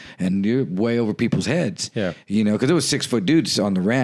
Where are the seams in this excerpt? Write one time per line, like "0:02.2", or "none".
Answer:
none